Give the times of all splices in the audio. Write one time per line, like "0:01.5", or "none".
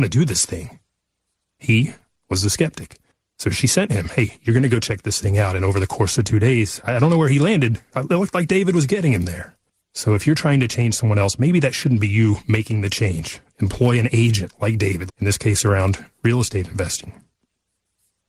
0:07.9
0:15.1